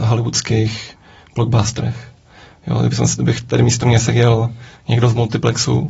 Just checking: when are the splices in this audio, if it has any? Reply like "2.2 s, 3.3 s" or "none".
none